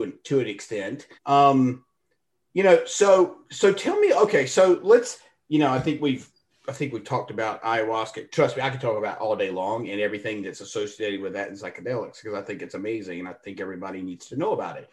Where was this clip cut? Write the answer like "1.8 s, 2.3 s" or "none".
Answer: 1.2 s